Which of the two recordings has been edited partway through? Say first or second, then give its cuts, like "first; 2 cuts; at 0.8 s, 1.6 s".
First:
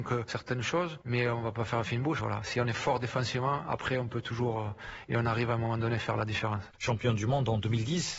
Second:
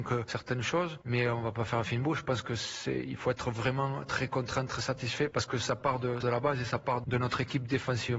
first; 2 cuts; at 2.2 s, 6.7 s